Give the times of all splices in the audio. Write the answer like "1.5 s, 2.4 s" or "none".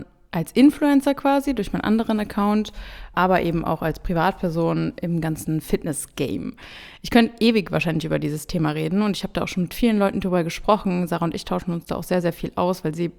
3.1 s